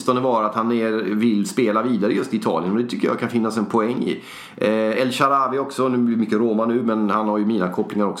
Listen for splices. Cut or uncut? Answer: uncut